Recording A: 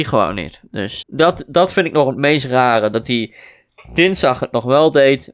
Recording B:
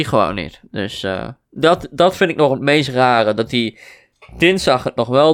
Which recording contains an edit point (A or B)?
A